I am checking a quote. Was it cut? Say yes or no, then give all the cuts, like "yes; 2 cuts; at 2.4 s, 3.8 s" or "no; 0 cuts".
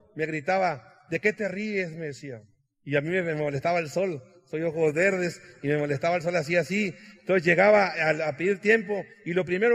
no; 0 cuts